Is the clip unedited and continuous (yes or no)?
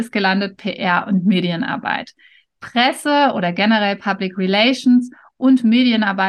yes